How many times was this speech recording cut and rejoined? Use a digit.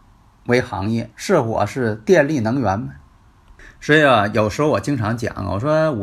1